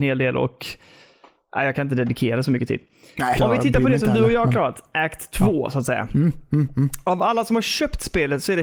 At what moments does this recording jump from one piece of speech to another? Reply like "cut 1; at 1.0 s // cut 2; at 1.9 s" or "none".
cut 1; at 3.4 s